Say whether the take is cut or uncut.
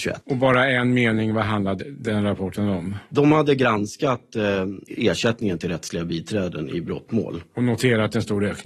uncut